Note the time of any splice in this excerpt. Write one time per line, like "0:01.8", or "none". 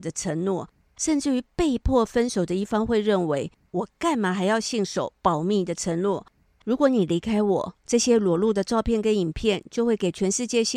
0:03.7
0:06.5